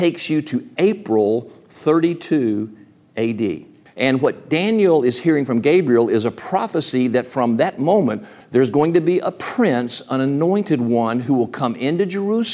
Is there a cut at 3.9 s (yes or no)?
yes